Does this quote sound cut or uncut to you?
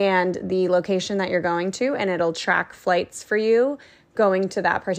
uncut